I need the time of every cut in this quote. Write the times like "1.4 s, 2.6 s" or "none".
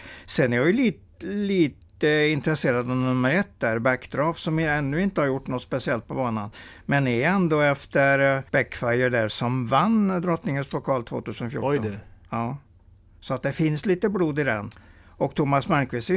8.5 s